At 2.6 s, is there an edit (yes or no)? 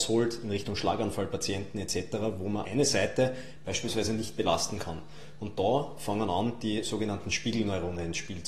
yes